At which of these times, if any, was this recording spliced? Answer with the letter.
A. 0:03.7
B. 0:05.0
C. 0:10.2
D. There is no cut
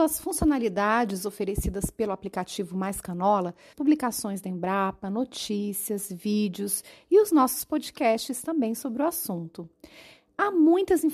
A